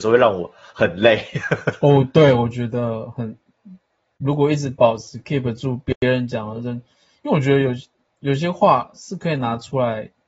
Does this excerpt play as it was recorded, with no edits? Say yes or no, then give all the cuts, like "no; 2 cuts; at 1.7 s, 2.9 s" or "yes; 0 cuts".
yes; 0 cuts